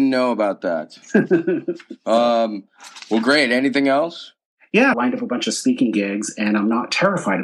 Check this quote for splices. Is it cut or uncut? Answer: cut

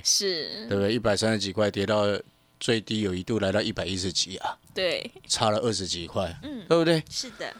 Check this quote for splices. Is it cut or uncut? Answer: uncut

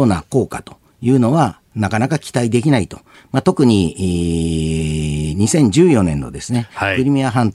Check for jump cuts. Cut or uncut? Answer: cut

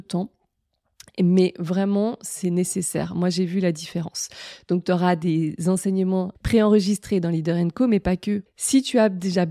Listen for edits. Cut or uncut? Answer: cut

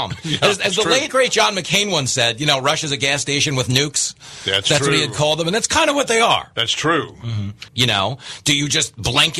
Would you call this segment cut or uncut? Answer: cut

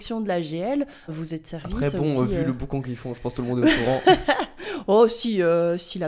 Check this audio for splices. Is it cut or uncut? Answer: cut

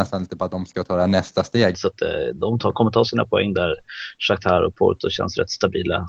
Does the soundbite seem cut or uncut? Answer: cut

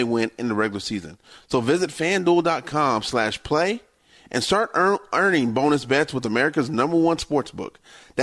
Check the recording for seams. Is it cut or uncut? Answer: uncut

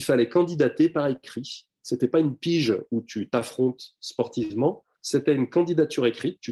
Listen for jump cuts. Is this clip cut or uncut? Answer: cut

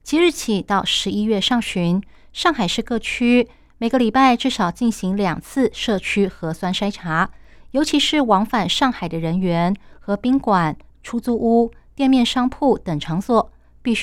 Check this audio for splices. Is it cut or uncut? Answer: cut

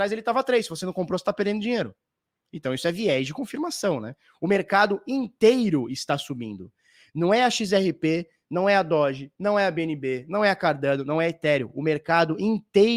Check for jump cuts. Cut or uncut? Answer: uncut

